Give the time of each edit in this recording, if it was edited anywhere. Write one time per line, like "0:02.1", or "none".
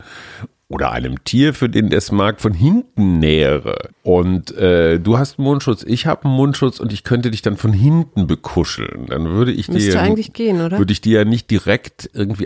0:03.9